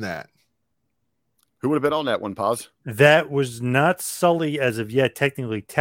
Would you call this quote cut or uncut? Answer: uncut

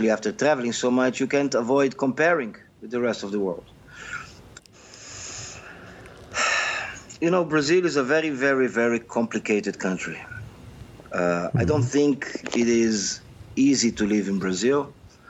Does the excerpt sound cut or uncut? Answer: cut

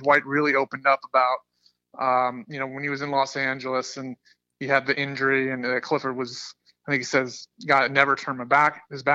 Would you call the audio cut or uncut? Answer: uncut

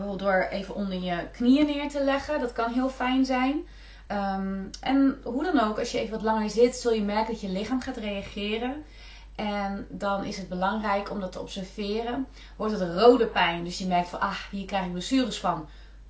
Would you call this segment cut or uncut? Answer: uncut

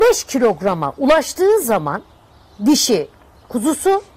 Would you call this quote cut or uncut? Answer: uncut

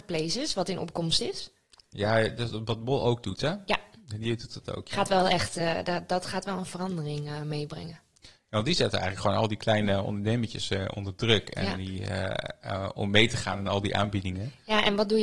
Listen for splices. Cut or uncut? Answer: uncut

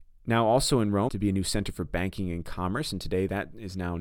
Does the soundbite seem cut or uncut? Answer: cut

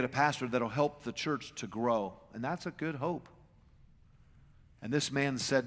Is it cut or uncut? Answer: uncut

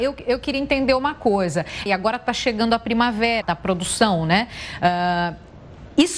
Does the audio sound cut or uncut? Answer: cut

